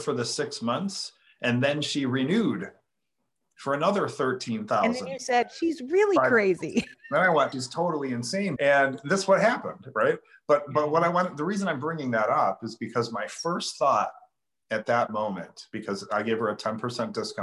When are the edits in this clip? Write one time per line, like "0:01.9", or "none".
0:07.5
0:08.6